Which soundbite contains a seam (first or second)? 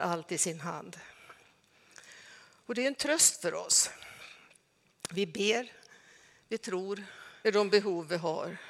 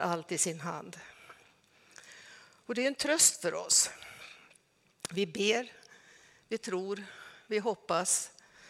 first